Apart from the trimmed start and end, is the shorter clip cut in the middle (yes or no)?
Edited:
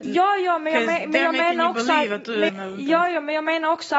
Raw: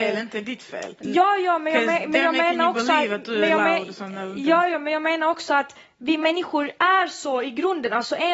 yes